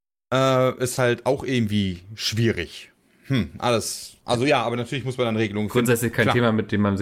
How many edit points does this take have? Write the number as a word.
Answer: one